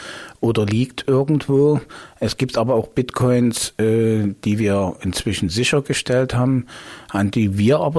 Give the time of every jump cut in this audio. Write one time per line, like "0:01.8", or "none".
none